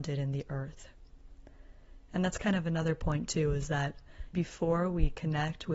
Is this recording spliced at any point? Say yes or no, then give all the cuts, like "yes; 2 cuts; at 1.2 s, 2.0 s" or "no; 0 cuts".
yes; 1 cut; at 4.3 s